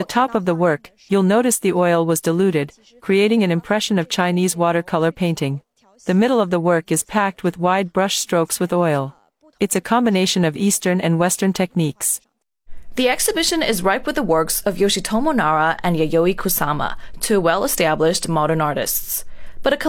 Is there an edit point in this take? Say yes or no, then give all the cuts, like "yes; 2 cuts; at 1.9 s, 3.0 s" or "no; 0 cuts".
no; 0 cuts